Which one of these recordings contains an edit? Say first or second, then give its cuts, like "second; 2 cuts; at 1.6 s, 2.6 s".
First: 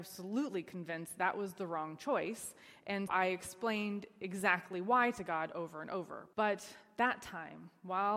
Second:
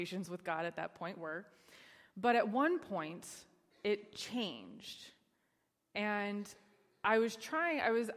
first; 2 cuts; at 3.1 s, 6.3 s